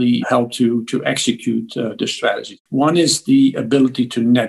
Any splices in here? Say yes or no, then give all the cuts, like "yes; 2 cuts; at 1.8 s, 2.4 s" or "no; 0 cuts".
yes; 1 cut; at 2.7 s